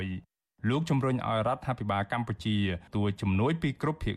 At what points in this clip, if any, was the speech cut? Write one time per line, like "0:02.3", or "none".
0:02.9